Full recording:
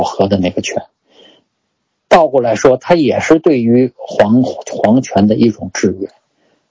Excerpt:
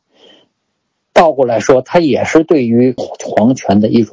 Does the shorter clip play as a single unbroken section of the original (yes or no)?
no